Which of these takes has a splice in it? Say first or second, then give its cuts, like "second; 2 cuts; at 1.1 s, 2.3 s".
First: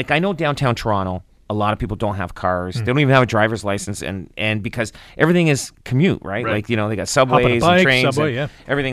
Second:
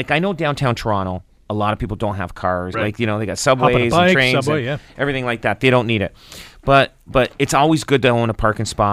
second; 1 cut; at 2.7 s